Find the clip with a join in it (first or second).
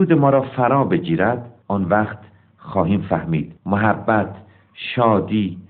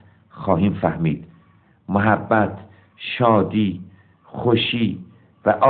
first